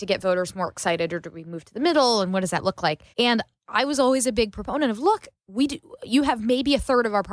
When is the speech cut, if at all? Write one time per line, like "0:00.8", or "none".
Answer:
0:03.1